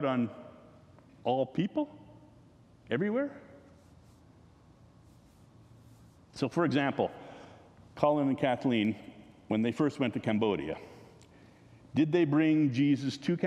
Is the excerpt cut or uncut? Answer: cut